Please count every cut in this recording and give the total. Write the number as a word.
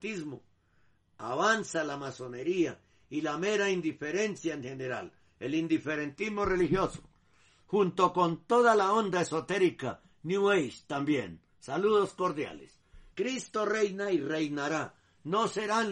one